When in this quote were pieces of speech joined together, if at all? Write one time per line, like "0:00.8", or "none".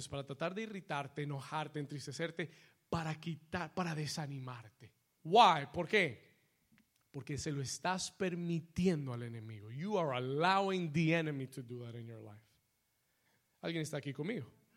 0:05.2